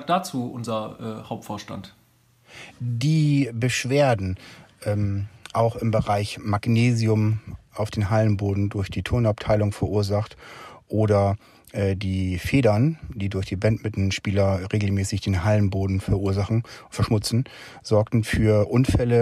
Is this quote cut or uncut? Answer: uncut